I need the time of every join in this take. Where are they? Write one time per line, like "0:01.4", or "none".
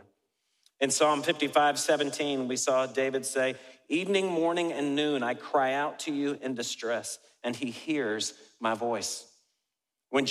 none